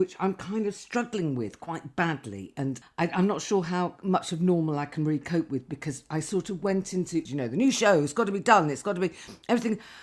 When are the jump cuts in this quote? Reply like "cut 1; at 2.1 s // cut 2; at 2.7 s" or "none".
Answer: cut 1; at 2.8 s // cut 2; at 7.3 s